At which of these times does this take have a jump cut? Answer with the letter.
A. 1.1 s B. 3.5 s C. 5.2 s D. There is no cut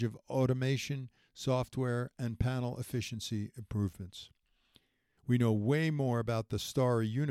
C